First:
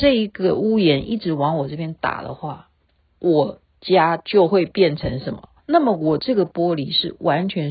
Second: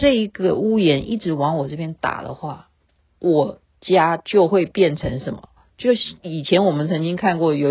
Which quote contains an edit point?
first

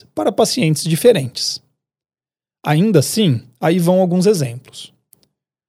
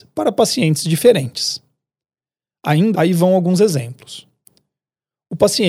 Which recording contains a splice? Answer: second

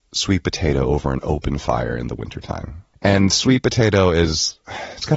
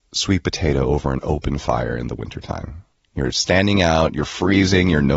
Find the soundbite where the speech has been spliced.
first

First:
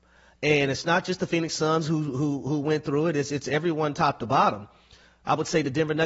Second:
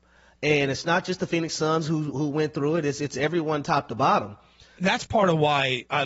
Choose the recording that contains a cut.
second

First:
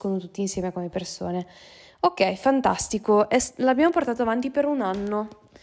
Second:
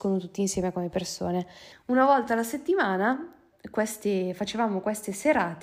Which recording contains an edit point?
second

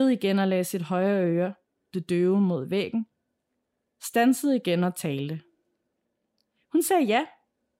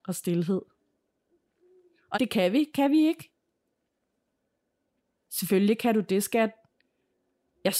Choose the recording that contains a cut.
second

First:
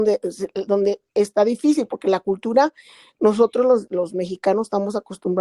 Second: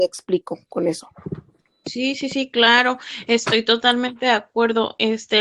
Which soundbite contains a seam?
first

